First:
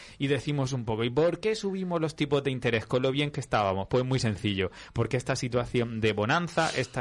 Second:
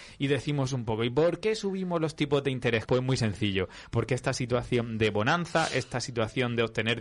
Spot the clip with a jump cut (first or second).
second